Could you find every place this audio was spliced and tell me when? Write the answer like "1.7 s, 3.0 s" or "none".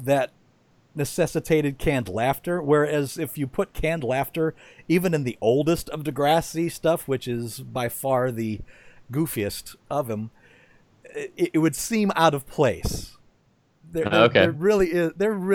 none